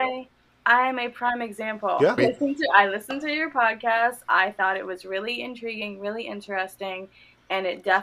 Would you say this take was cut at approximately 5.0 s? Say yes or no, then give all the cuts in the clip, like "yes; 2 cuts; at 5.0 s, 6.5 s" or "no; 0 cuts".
no; 1 cut; at 2.2 s